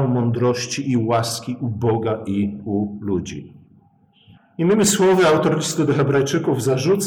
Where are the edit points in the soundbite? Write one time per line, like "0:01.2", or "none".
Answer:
0:04.4